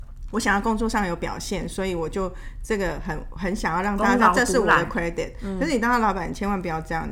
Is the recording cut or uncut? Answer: uncut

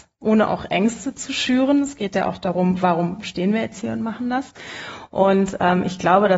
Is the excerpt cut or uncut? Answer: uncut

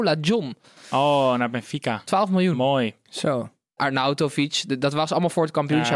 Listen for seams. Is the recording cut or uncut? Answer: cut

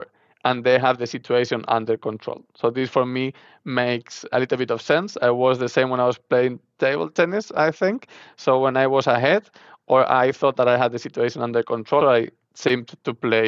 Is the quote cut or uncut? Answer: cut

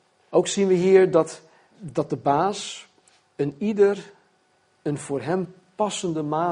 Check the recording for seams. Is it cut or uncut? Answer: cut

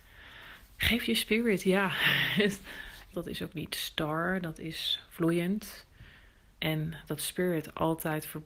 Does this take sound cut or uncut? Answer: cut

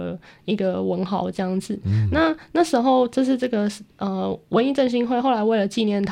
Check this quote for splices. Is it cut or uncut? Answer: uncut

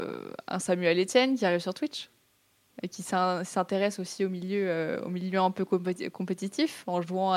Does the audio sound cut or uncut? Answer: uncut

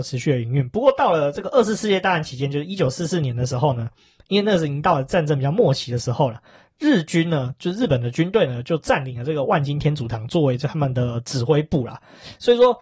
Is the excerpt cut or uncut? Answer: uncut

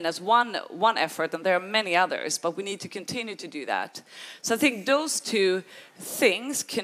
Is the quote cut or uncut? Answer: uncut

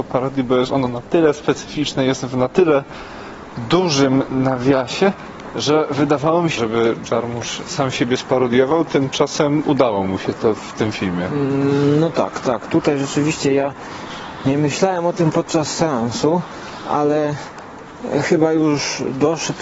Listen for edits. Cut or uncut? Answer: cut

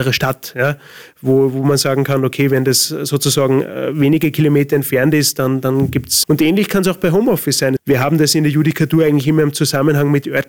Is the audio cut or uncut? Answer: cut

